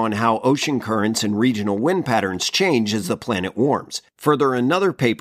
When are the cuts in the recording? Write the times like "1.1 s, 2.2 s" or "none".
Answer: 4.1 s